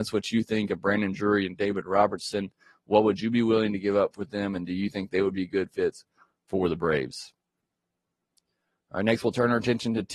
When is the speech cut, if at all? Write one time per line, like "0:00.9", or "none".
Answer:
none